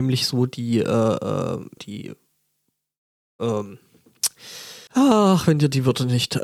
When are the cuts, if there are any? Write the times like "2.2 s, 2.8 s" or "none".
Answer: 1.8 s, 4.9 s